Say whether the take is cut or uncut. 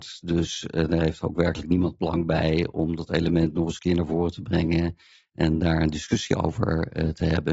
uncut